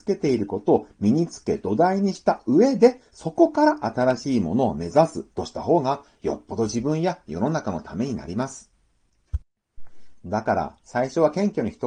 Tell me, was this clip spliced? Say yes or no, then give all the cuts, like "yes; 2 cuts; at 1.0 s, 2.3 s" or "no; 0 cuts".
yes; 1 cut; at 5.3 s